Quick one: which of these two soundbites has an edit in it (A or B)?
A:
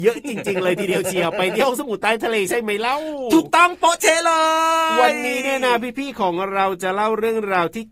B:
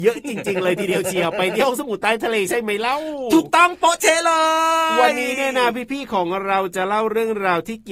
B